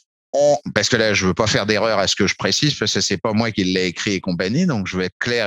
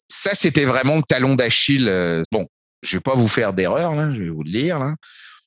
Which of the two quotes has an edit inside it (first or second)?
second